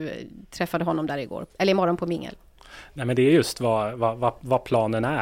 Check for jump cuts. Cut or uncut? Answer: uncut